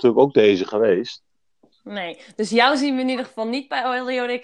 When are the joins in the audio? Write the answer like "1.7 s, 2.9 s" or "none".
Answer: 1.7 s